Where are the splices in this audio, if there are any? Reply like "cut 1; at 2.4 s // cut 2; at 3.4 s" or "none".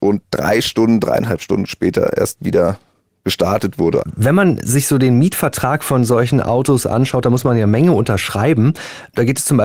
cut 1; at 4.0 s